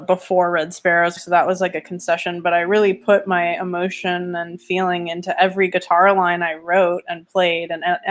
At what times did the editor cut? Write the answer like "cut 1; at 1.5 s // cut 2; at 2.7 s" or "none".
cut 1; at 1.2 s

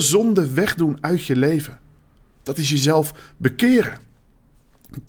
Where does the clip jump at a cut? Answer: none

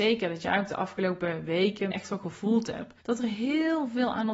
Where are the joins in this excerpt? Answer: cut 1; at 1.9 s // cut 2; at 3.0 s

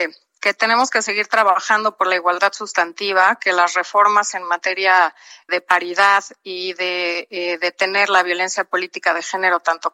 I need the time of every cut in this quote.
cut 1; at 5.5 s

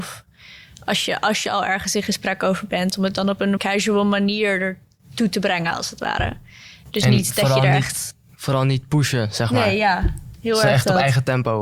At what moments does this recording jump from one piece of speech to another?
cut 1; at 3.6 s

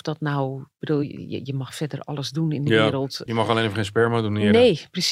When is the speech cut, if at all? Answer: none

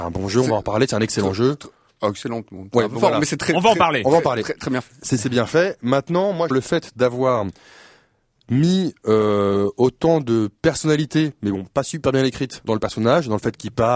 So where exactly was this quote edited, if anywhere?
cut 1; at 6.5 s // cut 2; at 12.7 s

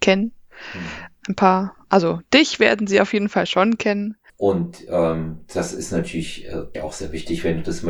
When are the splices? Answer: cut 1; at 4.3 s // cut 2; at 6.7 s

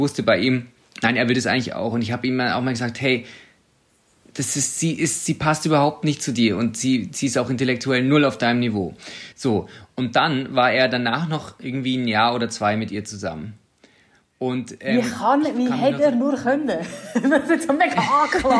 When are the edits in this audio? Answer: none

